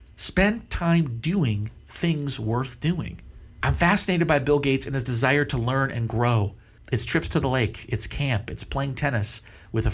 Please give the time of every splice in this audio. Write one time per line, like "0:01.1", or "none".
0:03.6
0:06.8